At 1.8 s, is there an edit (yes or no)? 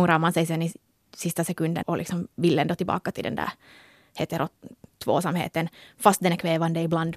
yes